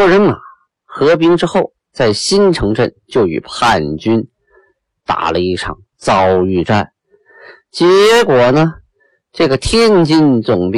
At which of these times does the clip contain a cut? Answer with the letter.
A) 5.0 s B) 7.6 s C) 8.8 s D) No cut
D